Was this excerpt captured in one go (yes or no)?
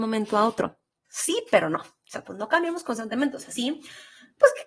no